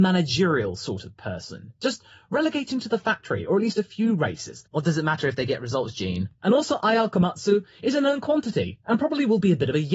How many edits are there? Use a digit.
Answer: 2